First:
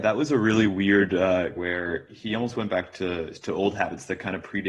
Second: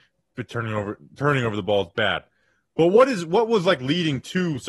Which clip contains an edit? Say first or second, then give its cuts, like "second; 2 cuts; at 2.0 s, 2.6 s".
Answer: first; 1 cut; at 1.6 s